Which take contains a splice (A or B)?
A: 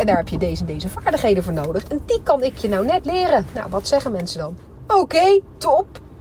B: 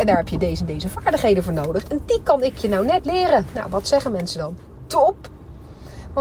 B